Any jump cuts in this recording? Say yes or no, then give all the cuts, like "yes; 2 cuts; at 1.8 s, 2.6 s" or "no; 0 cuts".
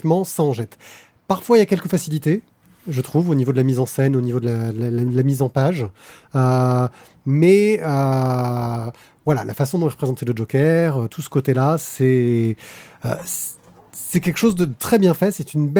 no; 0 cuts